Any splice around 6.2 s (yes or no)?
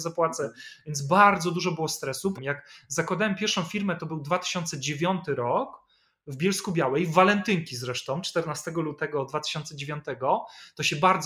no